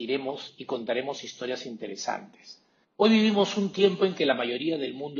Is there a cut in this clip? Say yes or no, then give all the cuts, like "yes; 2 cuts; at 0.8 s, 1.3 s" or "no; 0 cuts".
yes; 1 cut; at 2.8 s